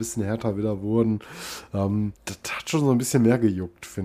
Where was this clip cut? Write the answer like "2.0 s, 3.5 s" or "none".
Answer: 2.2 s